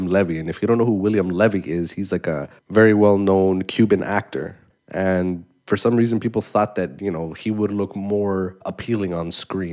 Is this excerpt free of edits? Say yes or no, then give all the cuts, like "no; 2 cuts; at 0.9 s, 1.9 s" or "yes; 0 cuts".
no; 1 cut; at 4.7 s